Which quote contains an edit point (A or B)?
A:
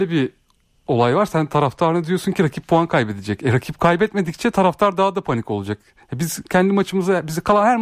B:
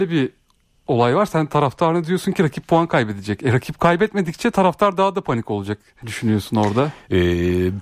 B